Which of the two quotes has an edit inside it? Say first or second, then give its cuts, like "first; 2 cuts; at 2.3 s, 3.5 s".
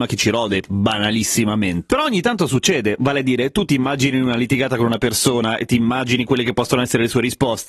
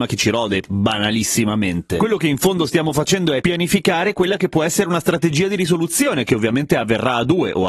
first; 1 cut; at 1.9 s